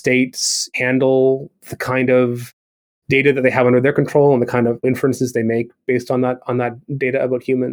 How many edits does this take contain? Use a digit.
0